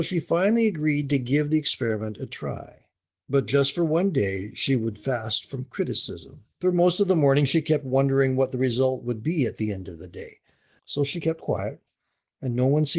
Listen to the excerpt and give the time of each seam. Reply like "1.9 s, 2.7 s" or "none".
6.5 s, 10.8 s